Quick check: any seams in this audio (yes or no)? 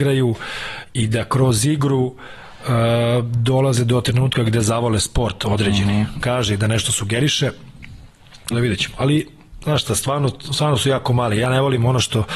yes